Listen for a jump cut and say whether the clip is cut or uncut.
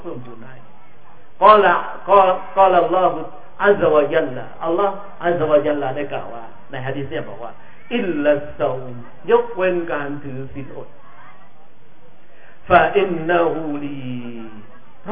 uncut